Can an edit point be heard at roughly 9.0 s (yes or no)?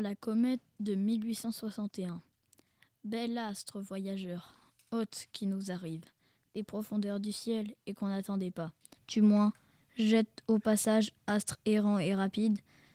yes